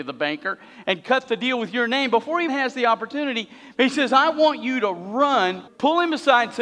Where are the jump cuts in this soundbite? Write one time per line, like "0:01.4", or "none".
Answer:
0:02.5
0:05.7